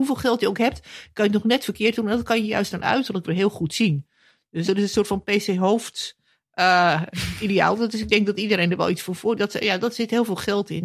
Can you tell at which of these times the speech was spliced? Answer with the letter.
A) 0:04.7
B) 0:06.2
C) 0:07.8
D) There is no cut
A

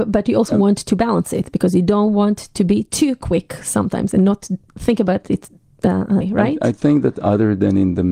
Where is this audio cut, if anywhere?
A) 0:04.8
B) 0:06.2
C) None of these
B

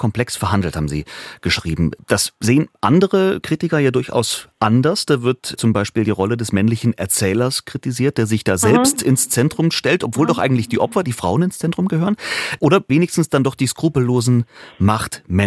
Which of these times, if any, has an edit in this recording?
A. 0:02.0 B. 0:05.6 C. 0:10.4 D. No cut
B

